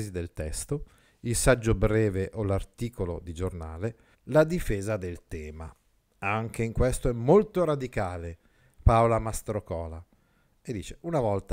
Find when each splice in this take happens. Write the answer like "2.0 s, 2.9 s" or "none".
4.1 s